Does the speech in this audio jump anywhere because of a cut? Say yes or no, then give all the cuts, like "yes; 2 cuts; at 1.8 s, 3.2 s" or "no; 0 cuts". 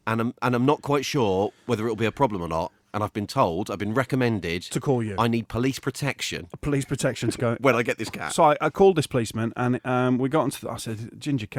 no; 0 cuts